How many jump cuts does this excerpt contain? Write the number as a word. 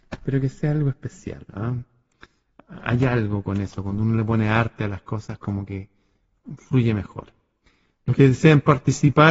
zero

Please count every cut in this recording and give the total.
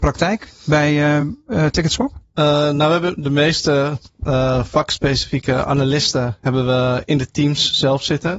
zero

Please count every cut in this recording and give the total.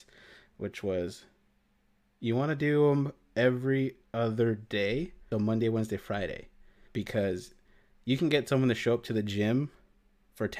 two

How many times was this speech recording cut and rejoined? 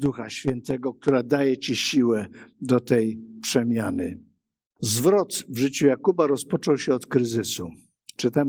one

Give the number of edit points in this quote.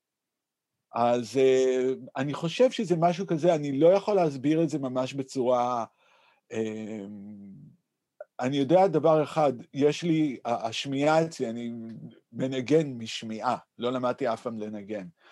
zero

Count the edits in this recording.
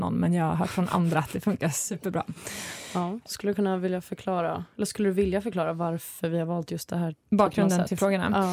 one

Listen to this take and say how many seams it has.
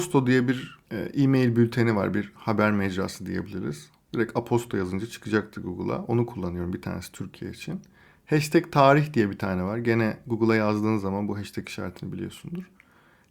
zero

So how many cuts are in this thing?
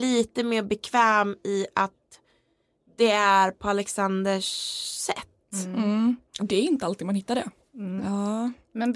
two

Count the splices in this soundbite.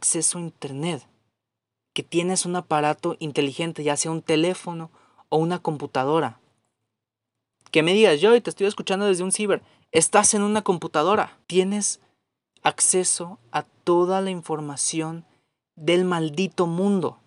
one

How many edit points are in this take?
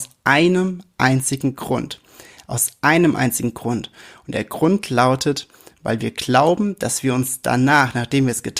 zero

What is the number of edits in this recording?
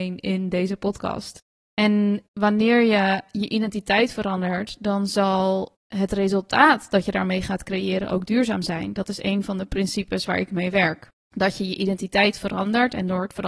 one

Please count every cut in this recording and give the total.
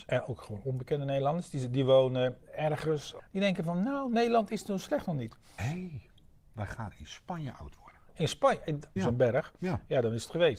three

